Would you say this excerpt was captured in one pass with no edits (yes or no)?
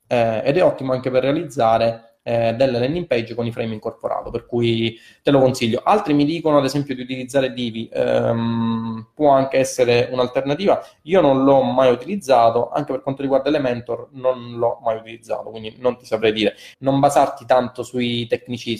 no